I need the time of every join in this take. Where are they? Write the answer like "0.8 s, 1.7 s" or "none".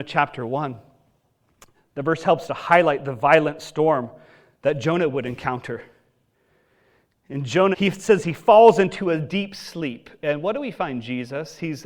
7.7 s